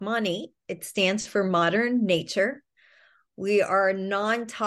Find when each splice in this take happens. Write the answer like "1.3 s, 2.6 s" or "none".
none

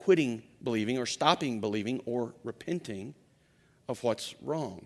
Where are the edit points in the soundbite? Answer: none

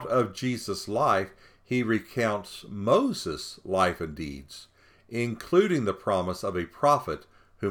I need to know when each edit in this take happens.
none

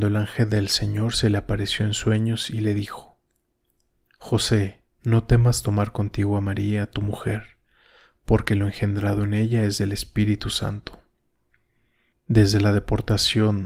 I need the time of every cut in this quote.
5.0 s, 12.1 s

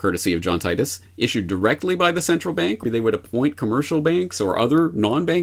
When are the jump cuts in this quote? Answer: 1.1 s, 2.8 s

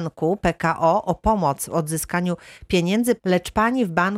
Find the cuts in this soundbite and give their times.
3.2 s

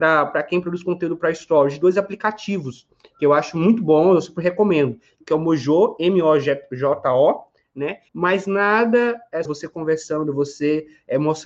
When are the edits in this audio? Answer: 5.2 s, 8.1 s, 9.4 s

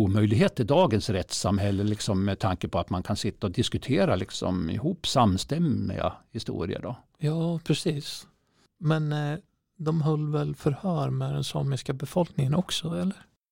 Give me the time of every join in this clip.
none

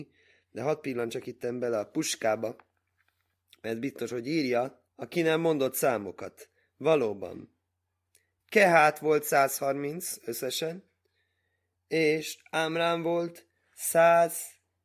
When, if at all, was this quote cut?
4.9 s

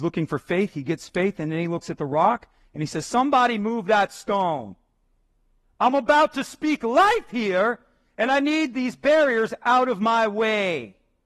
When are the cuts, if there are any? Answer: none

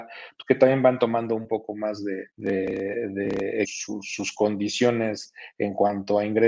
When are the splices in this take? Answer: 2.3 s, 3.6 s

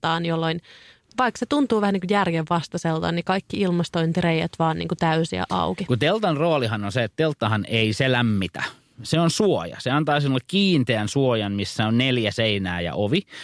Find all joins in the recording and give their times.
none

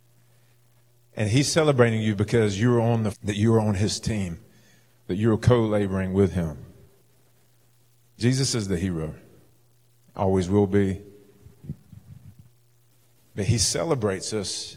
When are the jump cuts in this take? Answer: 3.1 s

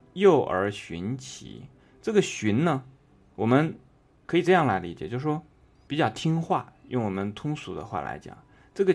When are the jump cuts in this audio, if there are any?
1.9 s

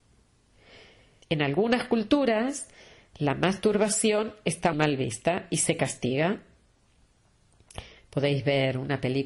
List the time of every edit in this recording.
1.2 s, 4.7 s

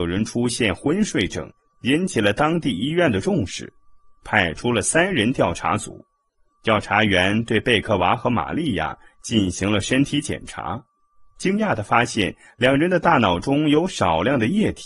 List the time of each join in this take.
none

